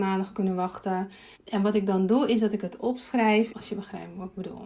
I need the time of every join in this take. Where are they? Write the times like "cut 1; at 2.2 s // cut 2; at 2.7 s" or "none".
cut 1; at 1.3 s // cut 2; at 3.5 s